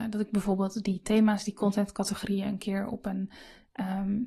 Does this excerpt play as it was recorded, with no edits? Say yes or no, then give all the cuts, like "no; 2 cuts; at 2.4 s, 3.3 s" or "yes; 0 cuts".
yes; 0 cuts